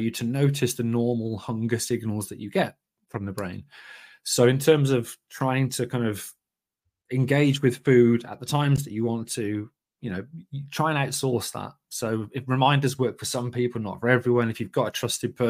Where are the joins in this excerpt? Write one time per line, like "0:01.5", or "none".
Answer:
none